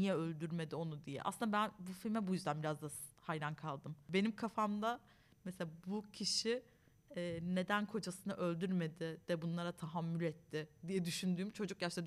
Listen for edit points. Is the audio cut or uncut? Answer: uncut